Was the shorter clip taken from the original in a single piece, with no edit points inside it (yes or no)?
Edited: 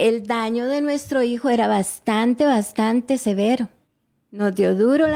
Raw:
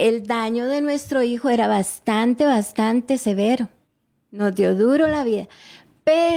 yes